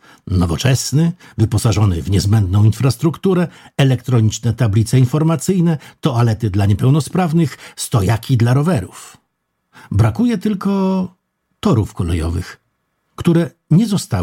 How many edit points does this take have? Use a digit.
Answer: 0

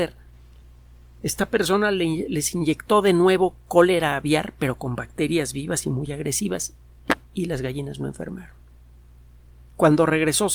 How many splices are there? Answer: 1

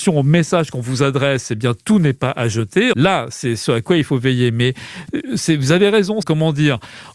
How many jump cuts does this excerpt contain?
2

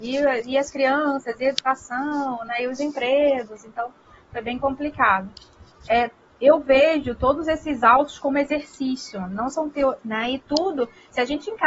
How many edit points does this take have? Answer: 1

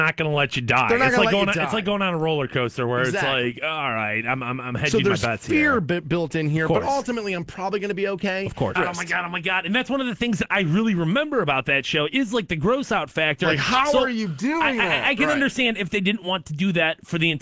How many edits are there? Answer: 1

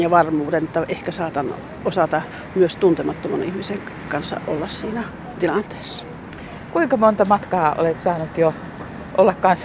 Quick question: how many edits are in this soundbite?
0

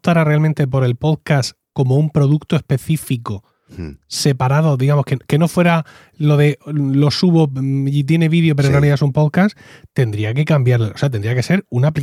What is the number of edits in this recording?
0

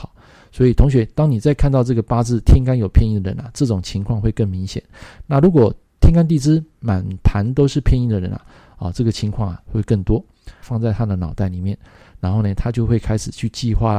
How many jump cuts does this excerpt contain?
1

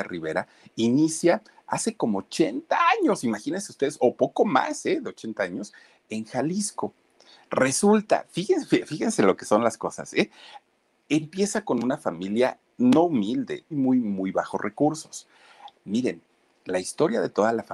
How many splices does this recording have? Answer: 2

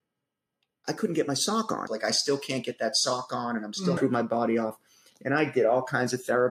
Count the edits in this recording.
2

